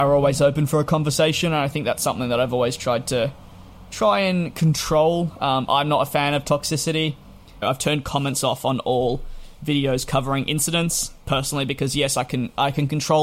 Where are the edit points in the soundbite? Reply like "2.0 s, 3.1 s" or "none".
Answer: 7.6 s